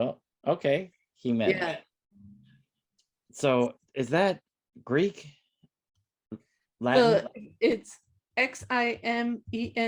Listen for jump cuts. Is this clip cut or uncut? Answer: uncut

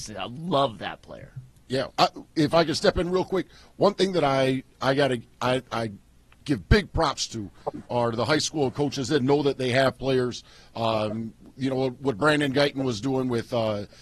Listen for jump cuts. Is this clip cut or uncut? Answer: uncut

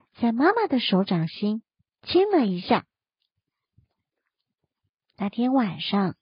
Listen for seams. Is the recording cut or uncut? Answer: cut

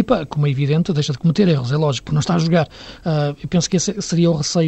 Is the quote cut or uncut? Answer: cut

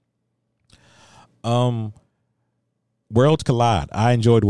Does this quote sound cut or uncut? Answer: uncut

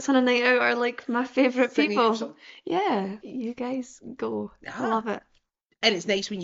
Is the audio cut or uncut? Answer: cut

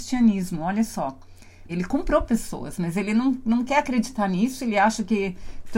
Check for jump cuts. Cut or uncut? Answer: cut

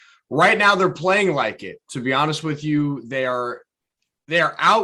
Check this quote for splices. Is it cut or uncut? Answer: uncut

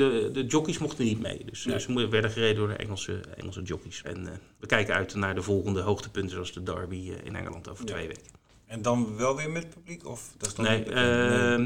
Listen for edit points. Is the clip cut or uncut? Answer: cut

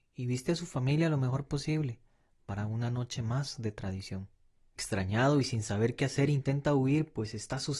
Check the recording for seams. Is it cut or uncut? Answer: cut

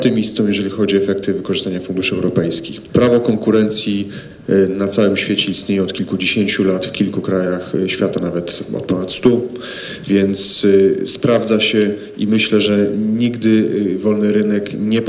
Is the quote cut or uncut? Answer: cut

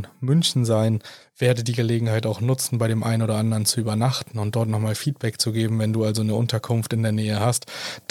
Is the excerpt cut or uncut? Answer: cut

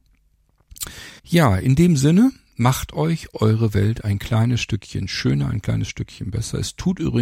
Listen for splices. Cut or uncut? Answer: cut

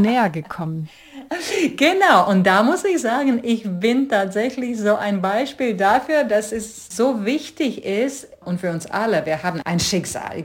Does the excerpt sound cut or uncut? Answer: uncut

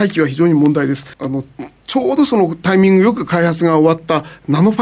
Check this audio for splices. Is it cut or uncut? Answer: cut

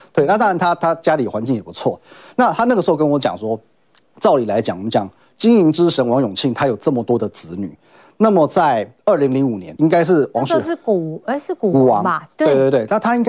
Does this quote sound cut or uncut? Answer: cut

